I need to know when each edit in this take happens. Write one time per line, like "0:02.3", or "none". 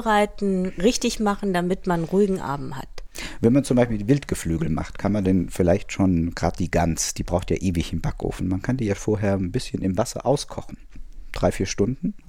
0:09.0

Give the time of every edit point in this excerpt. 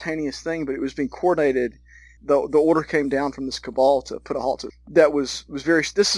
0:02.2
0:04.7

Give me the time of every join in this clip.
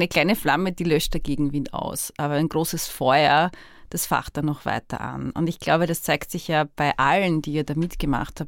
none

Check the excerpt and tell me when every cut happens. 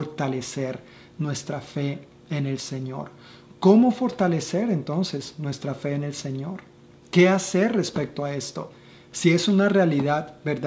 none

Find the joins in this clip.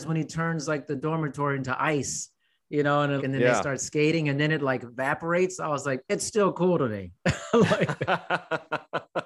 0:03.2

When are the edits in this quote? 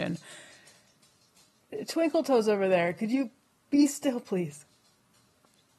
none

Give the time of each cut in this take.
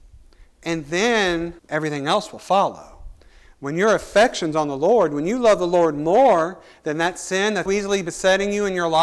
0:01.6
0:07.7

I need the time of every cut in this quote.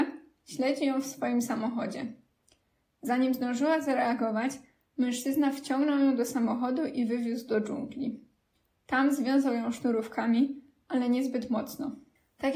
none

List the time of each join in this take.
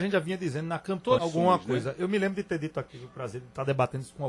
0:01.2
0:02.9

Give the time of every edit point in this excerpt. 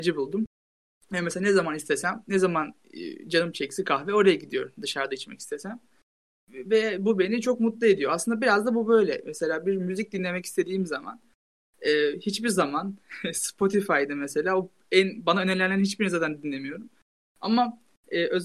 none

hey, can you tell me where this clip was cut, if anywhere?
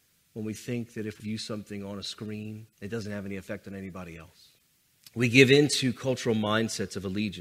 0:01.2
0:02.7
0:04.9

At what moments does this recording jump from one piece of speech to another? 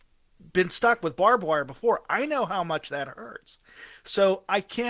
none

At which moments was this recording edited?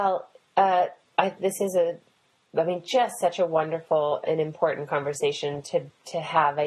0:01.4

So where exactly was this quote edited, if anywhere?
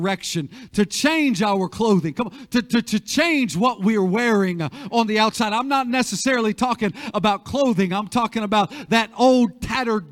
none

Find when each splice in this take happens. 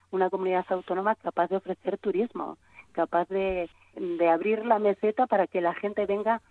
0:03.9

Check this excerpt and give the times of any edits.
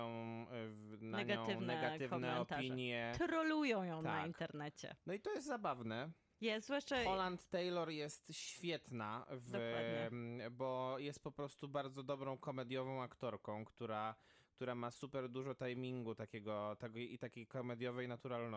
none

